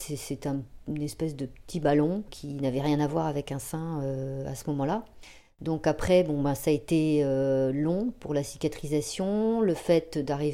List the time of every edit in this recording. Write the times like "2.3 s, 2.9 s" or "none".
none